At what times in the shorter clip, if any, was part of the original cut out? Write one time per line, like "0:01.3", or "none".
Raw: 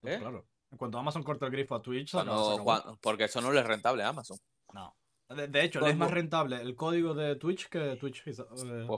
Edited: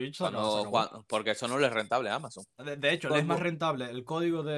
0:02.5